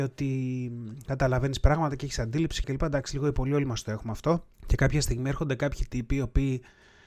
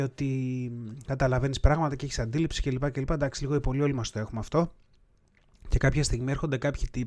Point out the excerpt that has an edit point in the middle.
first; 2 cuts; at 2.6 s, 4.5 s

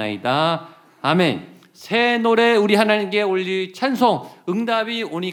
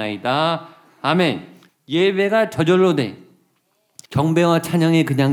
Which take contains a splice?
second; 2 cuts; at 1.7 s, 4.1 s

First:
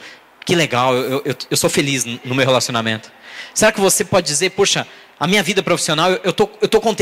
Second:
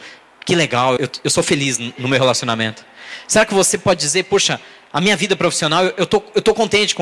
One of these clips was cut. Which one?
second; 1 cut; at 1.0 s

